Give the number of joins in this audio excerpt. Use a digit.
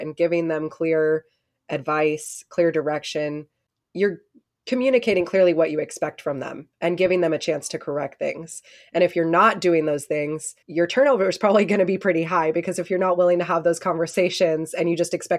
1